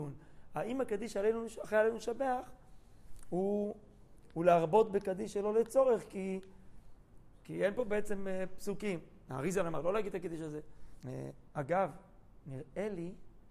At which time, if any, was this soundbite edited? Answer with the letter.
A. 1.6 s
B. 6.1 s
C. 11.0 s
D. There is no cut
C